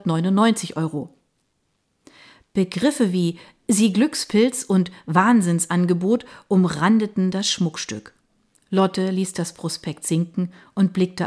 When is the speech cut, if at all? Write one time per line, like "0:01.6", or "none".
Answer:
none

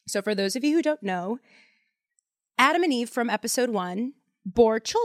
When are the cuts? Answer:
none

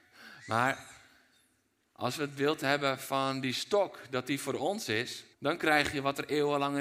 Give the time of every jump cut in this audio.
0:05.3

